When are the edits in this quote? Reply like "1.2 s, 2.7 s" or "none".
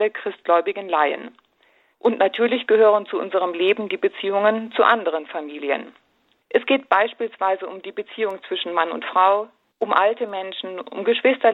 1.9 s, 6.4 s, 9.7 s